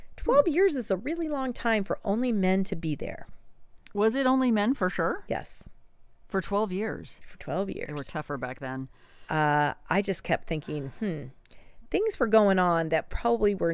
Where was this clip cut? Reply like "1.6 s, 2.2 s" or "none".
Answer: none